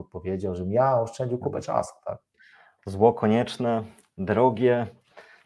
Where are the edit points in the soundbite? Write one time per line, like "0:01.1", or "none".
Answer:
none